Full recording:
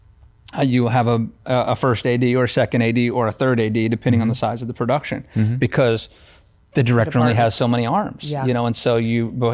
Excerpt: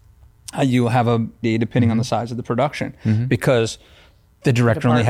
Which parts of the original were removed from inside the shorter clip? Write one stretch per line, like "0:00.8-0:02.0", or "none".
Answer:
0:01.4-0:03.7